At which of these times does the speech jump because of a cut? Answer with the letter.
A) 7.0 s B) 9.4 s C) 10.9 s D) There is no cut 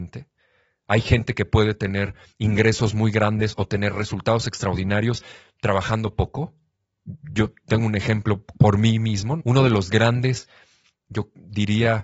B